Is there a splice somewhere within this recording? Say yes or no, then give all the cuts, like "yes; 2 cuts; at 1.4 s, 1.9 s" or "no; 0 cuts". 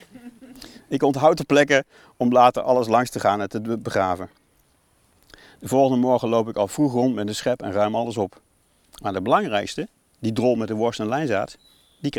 no; 0 cuts